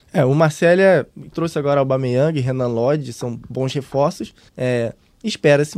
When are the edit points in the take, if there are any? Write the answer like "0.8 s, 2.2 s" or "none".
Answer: 1.3 s, 4.5 s